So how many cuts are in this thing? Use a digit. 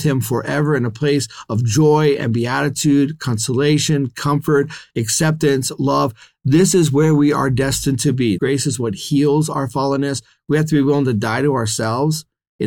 2